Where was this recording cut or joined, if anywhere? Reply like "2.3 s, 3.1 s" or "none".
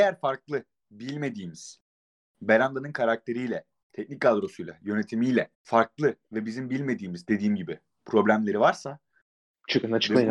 3.8 s, 5.5 s